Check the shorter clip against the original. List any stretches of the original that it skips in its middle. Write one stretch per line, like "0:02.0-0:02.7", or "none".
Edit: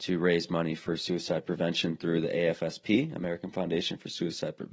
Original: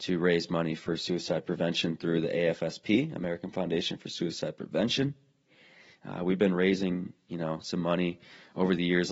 none

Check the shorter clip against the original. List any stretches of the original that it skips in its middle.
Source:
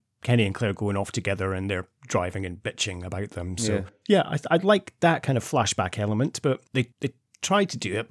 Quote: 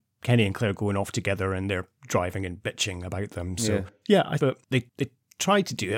0:04.4-0:06.4

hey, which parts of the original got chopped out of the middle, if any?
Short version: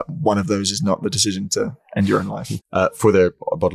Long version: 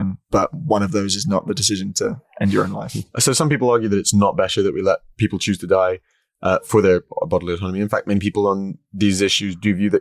0:03.0-0:06.3

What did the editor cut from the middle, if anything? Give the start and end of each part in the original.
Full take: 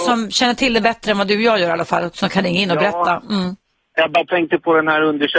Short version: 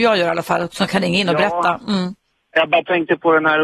none

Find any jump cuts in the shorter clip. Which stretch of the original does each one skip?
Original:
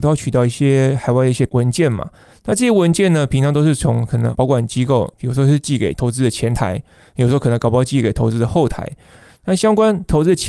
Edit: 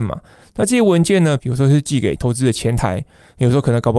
0:03.3-0:05.1

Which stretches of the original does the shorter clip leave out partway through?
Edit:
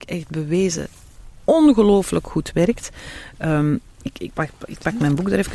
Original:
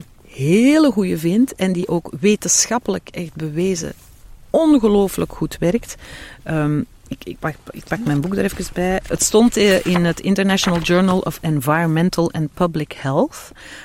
none

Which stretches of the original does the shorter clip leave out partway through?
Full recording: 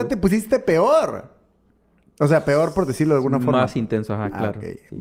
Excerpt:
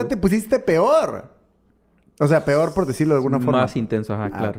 none

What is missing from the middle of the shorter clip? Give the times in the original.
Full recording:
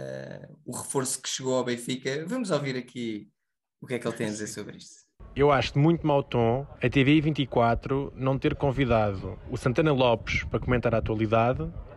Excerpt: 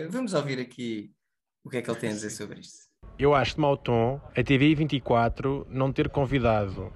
0:05.7-0:06.0

